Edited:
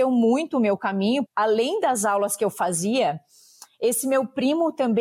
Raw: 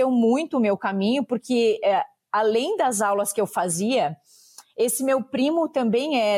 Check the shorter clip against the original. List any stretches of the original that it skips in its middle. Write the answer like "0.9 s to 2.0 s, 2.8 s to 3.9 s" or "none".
1.3 s to 2.2 s